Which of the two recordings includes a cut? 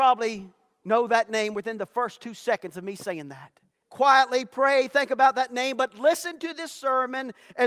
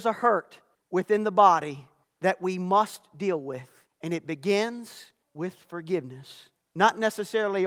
first; 1 cut; at 3.8 s

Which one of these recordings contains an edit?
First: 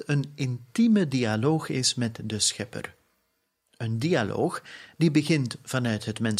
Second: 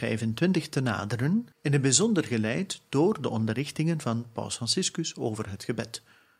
second; 1 cut; at 1.5 s

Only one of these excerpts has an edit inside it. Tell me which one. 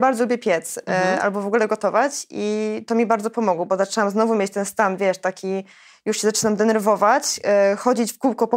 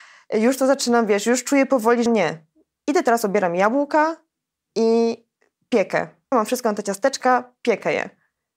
second; 2 cuts; at 2.1 s, 6.3 s

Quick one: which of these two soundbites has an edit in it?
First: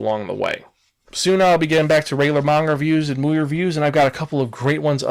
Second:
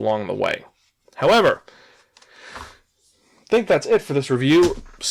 first; 1 cut; at 1.1 s

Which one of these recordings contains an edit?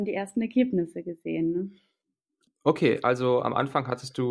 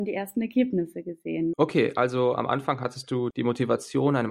second; 2 cuts; at 1.5 s, 3.3 s

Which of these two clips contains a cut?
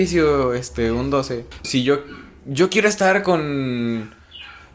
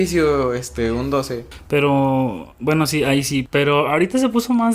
first; 1 cut; at 1.6 s

